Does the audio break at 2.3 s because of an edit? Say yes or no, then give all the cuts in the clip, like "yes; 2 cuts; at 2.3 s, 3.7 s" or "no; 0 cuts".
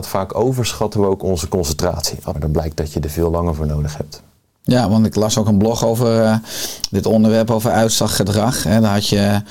yes; 1 cut; at 2.3 s